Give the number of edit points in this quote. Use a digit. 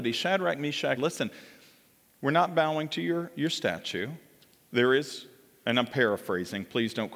1